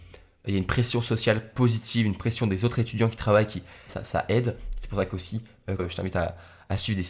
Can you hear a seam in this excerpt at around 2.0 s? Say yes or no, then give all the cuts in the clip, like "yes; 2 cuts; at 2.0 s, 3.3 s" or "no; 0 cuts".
no; 2 cuts; at 3.9 s, 5.8 s